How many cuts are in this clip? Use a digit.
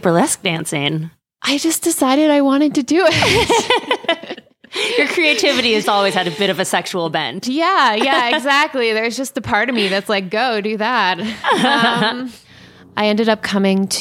1